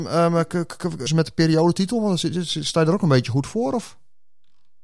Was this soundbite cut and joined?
yes; 1 cut; at 1.1 s

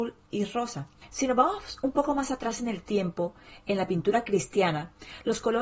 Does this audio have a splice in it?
yes; 1 cut; at 1.1 s

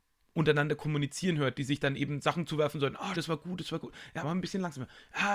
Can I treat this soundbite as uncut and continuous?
no; 2 cuts; at 3.1 s, 4.2 s

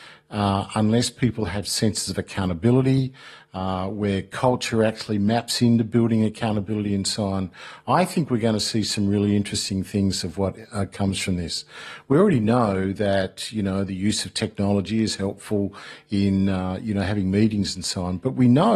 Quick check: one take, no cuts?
yes; 0 cuts

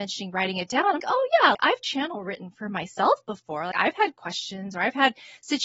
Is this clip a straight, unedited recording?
no; 1 cut; at 1.0 s

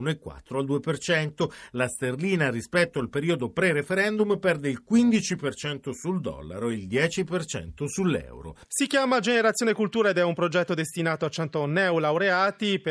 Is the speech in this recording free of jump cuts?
no; 1 cut; at 8.6 s

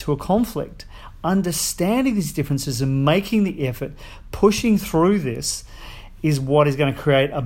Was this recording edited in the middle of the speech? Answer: no; 0 cuts

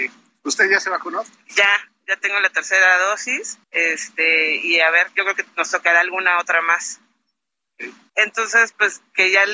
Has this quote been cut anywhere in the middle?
yes; 2 cuts; at 3.6 s, 8.1 s

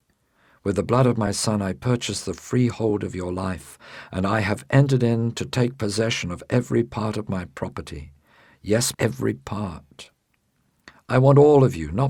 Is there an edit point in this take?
yes; 1 cut; at 8.9 s

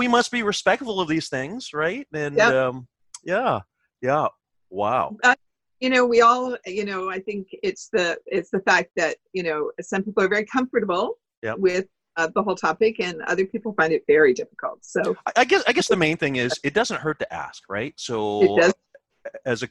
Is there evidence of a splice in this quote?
no; 0 cuts

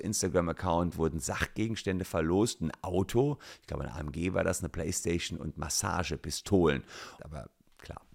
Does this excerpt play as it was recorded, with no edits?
no; 1 cut; at 7.2 s

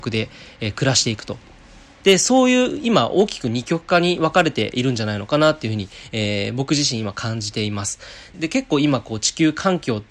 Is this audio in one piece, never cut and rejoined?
no; 2 cuts; at 2.0 s, 8.3 s

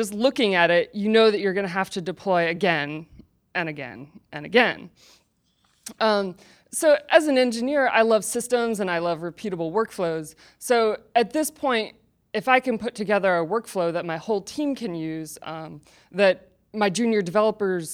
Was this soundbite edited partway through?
no; 0 cuts

